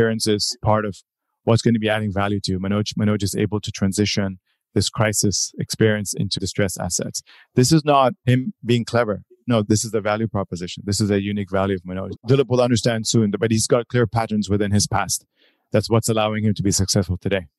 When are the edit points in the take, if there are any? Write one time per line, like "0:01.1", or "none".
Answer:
0:06.4
0:12.1